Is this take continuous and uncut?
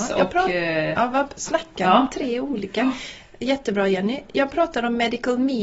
yes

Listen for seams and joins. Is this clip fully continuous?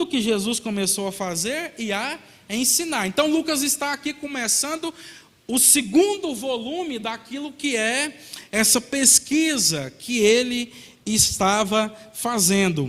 yes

